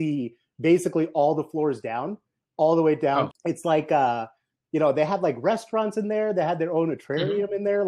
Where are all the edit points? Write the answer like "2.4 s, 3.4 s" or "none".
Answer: 3.3 s